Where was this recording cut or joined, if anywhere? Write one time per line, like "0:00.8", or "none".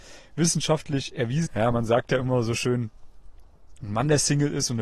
0:01.5